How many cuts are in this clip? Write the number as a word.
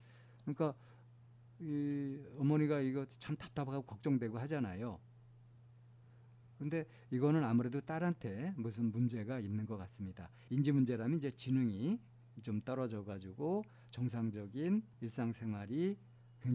two